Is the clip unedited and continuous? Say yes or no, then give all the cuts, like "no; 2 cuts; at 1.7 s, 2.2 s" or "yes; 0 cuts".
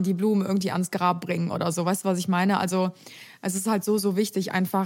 yes; 0 cuts